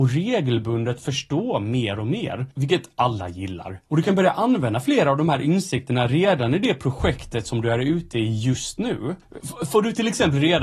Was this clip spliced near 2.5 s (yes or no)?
yes